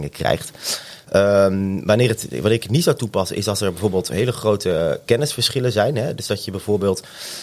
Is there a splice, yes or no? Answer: yes